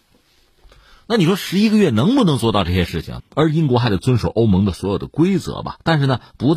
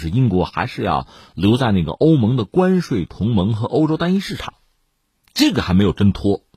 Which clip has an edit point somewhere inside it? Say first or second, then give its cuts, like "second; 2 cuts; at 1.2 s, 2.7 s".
first; 1 cut; at 3.2 s